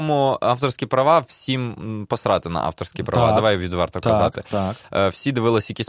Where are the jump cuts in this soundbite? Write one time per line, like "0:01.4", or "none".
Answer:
none